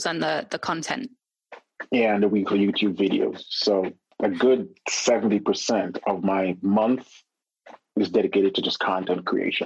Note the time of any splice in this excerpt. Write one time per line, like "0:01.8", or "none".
none